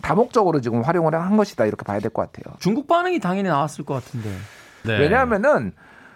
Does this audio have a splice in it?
yes; 2 cuts; at 2.6 s, 4.8 s

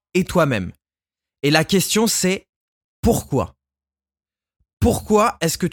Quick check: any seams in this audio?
no; 0 cuts

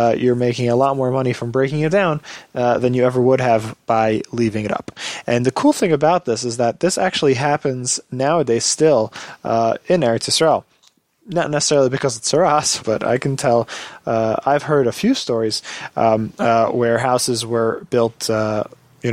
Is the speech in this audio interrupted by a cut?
yes; 2 cuts; at 12.8 s, 16.4 s

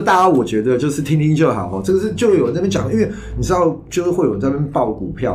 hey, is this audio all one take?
yes; 0 cuts

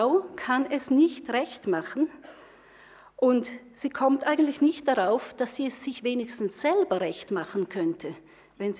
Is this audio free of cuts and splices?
yes; 0 cuts

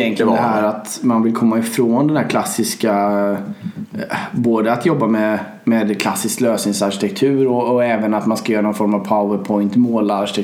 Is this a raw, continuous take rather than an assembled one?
yes; 0 cuts

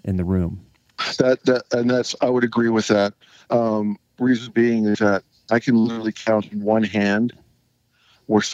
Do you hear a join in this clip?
no; 0 cuts

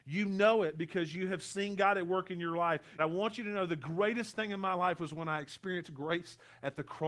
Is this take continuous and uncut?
no; 1 cut; at 3.0 s

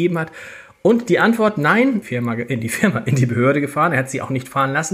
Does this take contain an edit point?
yes; 1 cut; at 2.0 s

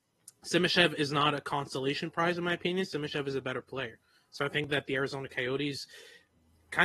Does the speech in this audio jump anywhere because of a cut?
no; 0 cuts

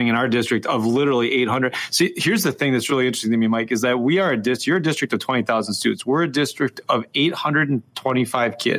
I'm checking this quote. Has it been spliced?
no; 0 cuts

